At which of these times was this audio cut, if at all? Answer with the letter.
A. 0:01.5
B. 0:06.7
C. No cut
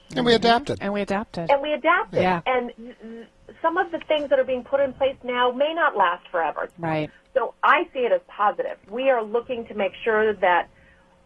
B